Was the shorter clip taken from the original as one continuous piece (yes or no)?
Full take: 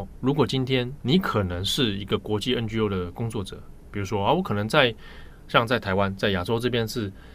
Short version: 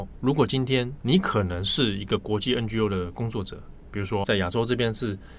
no